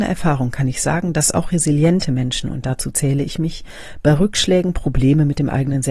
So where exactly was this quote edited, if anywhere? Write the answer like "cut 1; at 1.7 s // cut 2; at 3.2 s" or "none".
none